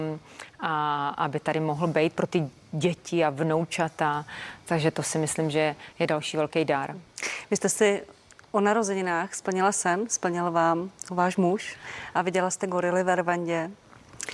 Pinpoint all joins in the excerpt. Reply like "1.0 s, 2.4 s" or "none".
none